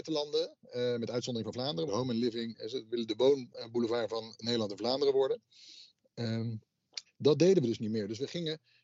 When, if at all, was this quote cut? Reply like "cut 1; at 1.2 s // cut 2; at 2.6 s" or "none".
cut 1; at 1.9 s // cut 2; at 7.1 s